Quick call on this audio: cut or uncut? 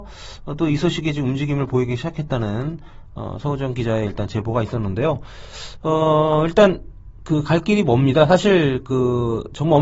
uncut